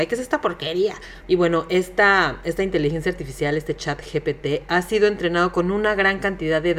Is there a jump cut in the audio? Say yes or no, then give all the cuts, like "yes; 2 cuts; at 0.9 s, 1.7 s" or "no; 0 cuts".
yes; 1 cut; at 1.2 s